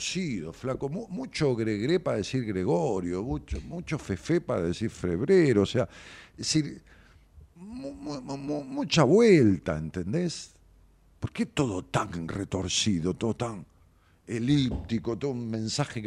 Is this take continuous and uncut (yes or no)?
yes